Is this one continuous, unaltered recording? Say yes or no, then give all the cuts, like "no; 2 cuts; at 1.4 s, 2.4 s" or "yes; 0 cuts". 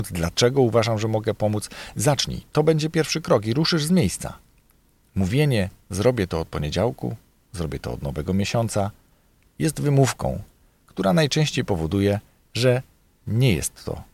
yes; 0 cuts